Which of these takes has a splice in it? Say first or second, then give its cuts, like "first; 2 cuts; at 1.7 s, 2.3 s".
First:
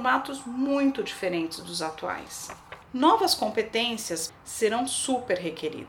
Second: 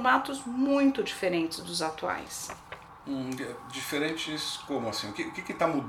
first; 2 cuts; at 2.8 s, 4.3 s